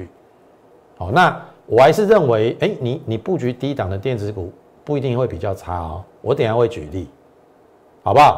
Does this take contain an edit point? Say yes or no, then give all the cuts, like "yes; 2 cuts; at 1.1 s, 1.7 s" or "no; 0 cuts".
no; 0 cuts